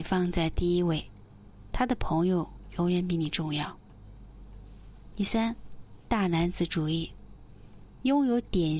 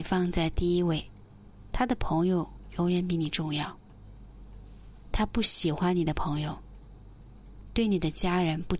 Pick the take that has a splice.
first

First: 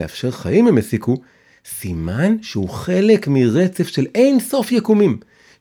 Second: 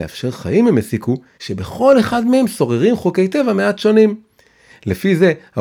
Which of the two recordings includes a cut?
second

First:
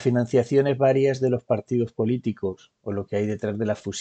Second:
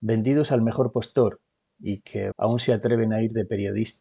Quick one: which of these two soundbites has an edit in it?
second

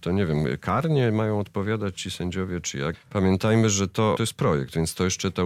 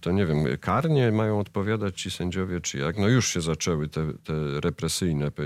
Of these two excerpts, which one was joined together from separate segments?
first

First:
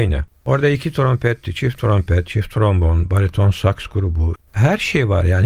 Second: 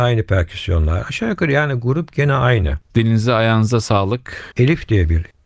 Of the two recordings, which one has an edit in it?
second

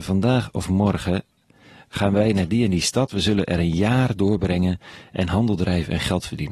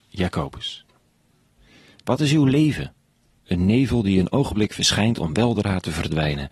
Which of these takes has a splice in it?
second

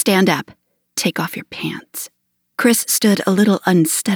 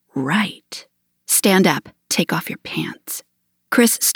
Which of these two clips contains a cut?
second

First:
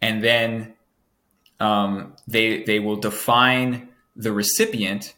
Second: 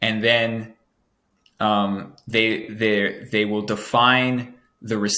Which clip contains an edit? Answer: first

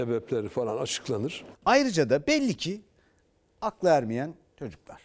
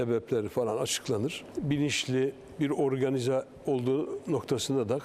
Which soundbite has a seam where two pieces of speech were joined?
first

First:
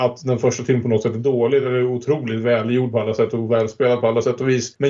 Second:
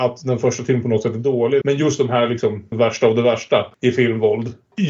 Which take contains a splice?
second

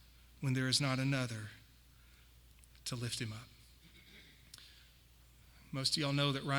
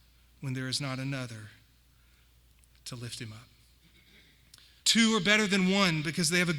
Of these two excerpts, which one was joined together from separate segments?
second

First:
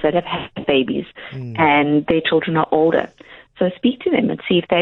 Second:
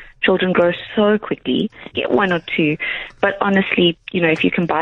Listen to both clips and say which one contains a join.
second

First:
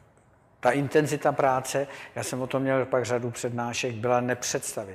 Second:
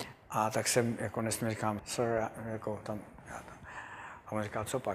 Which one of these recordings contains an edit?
second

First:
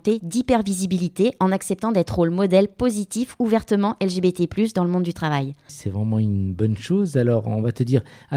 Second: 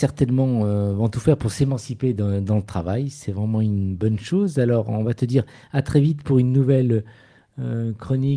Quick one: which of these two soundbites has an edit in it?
first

